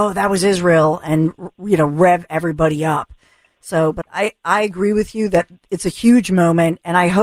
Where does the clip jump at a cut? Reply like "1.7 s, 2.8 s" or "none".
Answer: 4.0 s

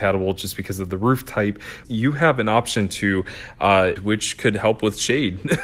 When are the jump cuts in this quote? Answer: 1.8 s, 4.0 s

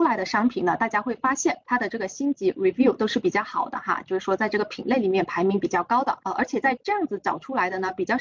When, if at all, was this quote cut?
1.6 s

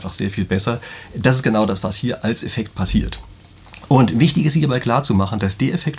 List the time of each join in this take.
none

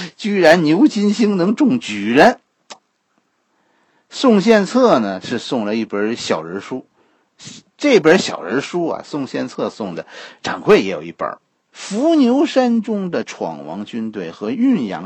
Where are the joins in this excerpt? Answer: 11.5 s

